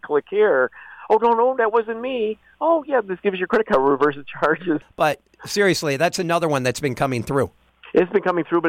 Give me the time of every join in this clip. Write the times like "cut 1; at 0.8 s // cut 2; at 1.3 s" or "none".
cut 1; at 4.8 s